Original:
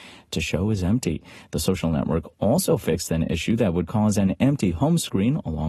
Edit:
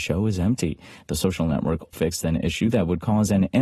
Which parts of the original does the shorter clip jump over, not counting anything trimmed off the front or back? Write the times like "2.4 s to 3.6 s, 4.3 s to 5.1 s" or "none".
2.4 s to 2.8 s